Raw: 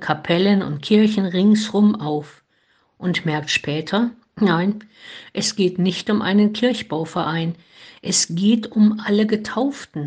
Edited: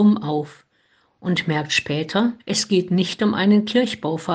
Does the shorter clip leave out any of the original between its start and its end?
yes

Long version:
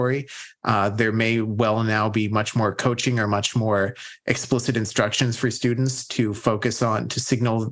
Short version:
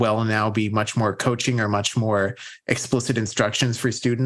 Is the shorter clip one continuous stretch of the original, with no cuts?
yes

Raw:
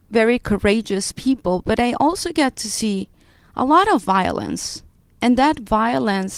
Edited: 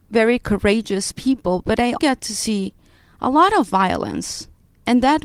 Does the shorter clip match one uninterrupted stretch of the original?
no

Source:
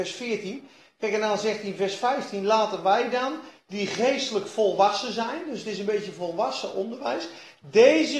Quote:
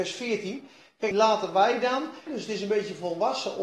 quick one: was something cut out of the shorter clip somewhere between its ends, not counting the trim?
yes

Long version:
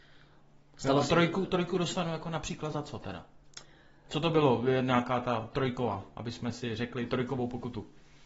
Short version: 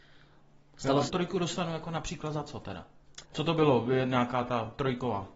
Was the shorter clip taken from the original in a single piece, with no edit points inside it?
no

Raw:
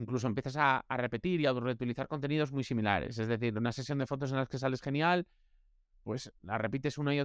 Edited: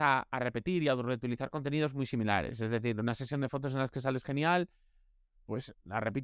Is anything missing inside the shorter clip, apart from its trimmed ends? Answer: no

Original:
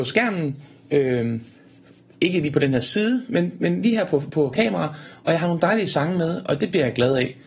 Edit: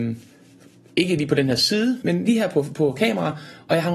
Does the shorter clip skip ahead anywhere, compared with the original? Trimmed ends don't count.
yes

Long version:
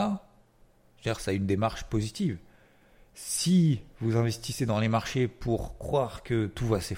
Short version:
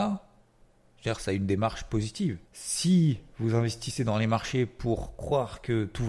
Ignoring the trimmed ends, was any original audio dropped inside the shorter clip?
yes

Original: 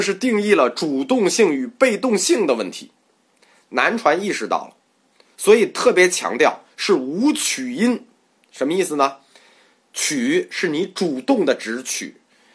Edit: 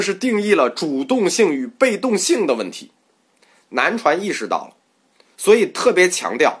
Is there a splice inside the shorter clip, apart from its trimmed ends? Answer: no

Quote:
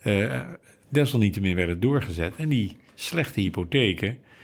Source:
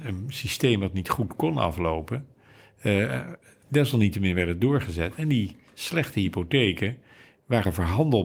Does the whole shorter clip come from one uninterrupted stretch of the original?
yes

